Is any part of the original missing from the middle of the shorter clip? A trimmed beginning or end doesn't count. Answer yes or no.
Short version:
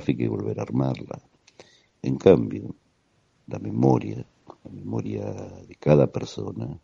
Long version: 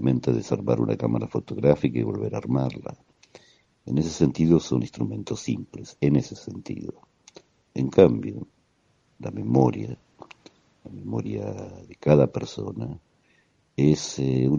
yes